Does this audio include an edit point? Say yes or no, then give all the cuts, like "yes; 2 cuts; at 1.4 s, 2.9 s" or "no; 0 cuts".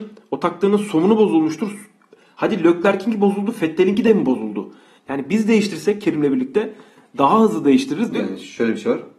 yes; 2 cuts; at 5.0 s, 8.1 s